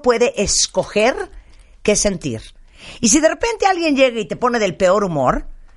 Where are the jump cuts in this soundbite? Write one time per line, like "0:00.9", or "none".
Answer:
none